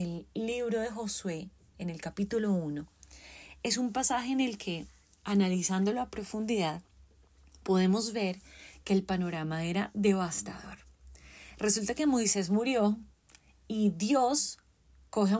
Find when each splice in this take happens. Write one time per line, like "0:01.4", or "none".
none